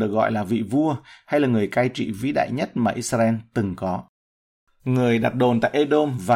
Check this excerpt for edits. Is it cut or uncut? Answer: cut